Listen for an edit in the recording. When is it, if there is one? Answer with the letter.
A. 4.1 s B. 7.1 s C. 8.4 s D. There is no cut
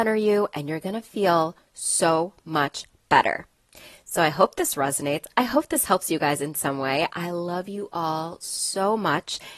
B